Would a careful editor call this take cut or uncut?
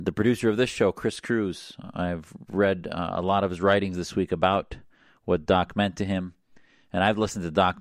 uncut